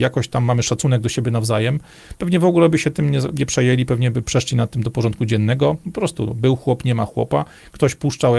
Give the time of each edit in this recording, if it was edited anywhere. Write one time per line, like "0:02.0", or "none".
none